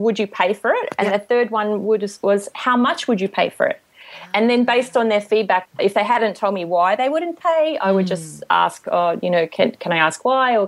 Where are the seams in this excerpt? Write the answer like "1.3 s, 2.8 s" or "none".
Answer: 5.7 s